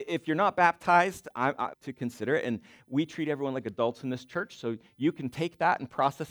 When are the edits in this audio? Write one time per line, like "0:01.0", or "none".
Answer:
0:01.7